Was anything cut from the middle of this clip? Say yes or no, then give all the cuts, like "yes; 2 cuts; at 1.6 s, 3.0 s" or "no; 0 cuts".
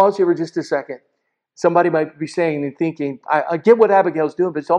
yes; 1 cut; at 3.2 s